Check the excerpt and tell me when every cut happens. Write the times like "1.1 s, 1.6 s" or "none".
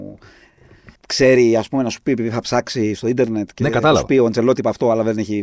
1.0 s

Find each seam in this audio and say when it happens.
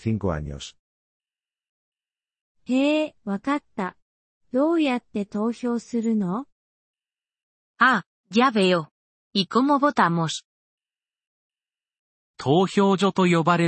none

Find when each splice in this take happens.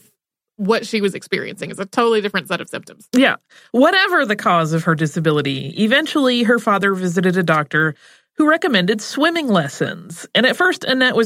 3.1 s

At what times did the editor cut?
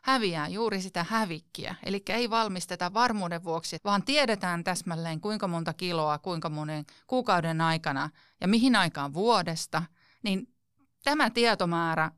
3.8 s, 10.2 s

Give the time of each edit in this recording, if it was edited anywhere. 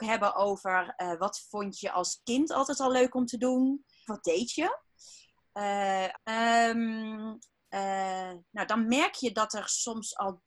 4.1 s, 6.1 s

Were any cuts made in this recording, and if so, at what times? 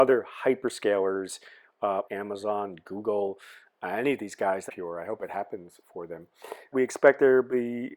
2.0 s, 4.7 s, 6.7 s

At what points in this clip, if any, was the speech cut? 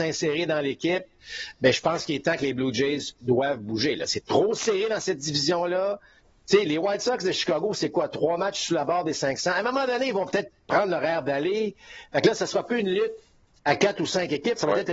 none

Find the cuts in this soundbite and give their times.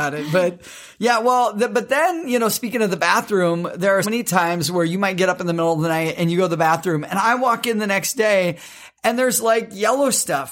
4.0 s

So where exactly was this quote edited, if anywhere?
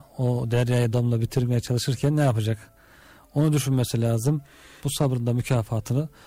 0.9 s, 4.8 s

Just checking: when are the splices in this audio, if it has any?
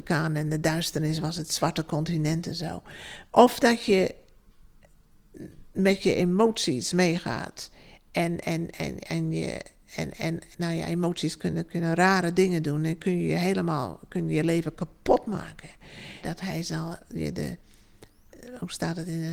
3.3 s, 16.2 s

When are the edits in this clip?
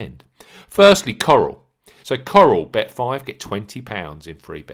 2.0 s

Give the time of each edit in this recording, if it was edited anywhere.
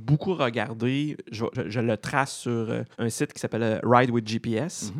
1.5 s, 2.9 s

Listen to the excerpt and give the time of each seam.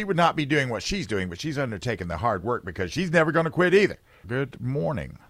4.2 s

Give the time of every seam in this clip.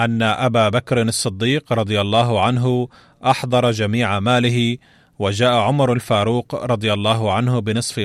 none

